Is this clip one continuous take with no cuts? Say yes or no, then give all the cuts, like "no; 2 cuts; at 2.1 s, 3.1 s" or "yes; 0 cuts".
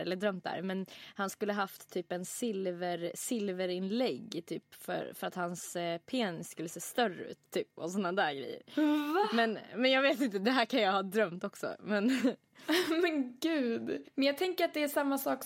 no; 1 cut; at 14.0 s